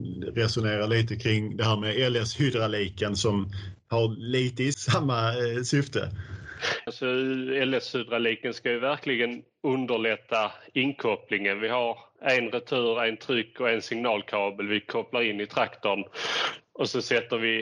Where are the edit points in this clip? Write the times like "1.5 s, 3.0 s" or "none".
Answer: 4.7 s, 6.9 s